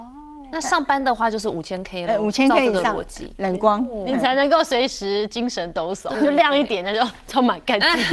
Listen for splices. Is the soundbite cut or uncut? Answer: cut